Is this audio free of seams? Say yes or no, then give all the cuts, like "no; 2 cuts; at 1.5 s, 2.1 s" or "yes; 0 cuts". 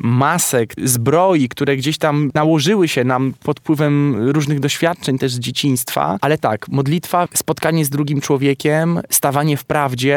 no; 2 cuts; at 6.2 s, 7.3 s